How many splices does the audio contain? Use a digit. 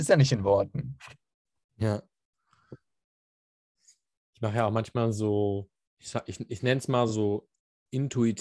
0